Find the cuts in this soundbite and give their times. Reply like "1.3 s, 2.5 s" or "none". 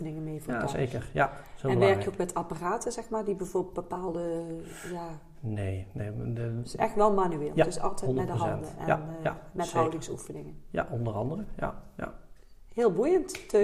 none